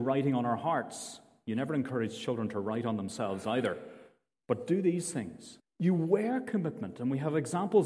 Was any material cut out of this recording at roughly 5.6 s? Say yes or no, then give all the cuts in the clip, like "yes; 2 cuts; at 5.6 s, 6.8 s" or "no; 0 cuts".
yes; 1 cut; at 5.6 s